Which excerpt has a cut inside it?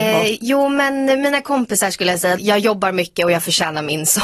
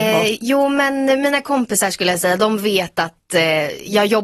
first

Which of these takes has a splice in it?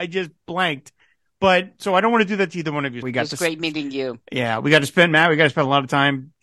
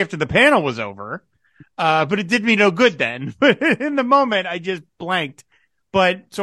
first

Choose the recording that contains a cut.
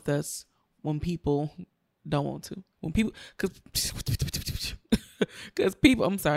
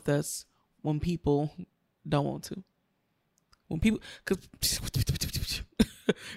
first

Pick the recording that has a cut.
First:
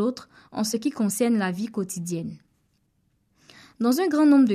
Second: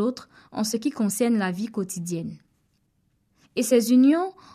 second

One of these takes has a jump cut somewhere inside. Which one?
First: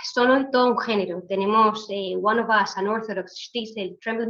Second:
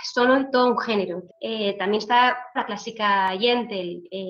second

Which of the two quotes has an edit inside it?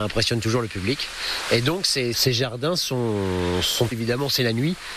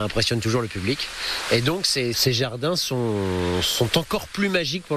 first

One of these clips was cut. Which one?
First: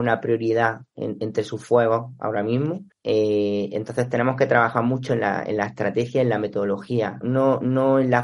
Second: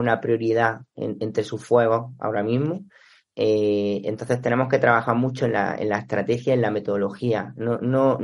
first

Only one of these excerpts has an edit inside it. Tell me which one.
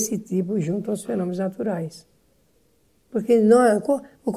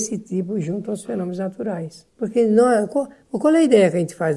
second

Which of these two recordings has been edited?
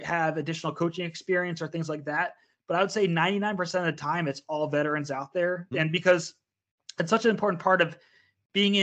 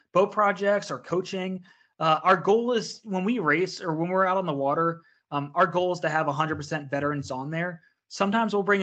first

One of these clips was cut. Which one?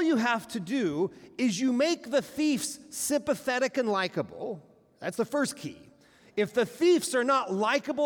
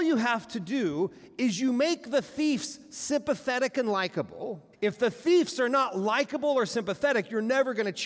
second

